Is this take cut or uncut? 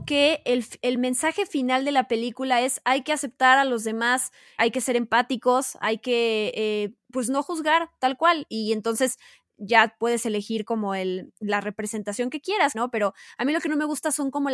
cut